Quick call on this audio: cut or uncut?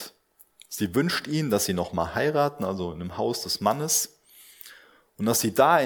uncut